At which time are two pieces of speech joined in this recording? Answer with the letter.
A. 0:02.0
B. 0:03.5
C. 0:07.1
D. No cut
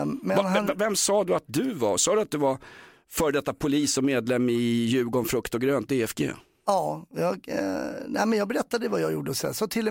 D